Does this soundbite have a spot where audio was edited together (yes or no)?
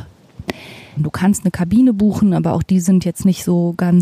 yes